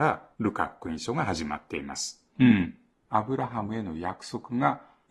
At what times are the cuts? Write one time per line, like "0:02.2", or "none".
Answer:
0:02.4